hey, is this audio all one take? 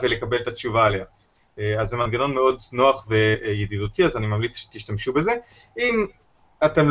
yes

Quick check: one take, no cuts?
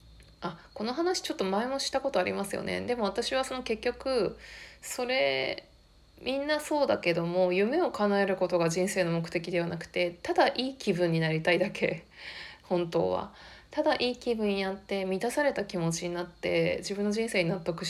yes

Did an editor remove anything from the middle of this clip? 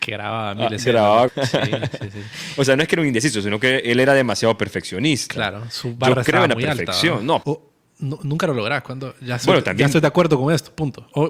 yes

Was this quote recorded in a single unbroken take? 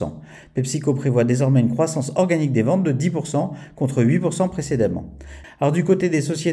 no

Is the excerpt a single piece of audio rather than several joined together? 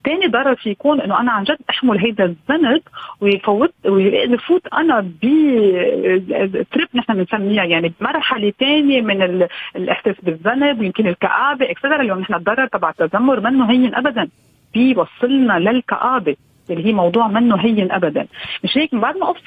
yes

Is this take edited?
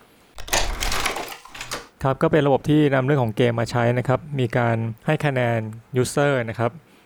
yes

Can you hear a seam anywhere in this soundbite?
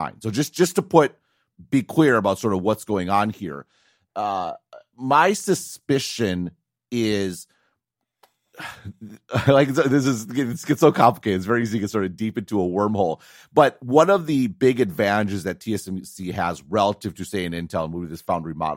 no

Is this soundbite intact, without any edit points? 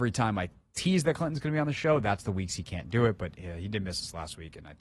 yes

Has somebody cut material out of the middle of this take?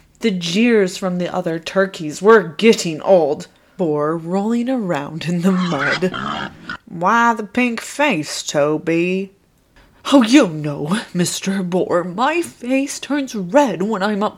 yes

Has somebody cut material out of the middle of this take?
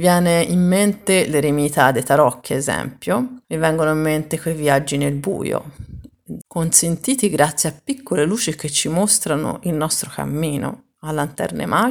yes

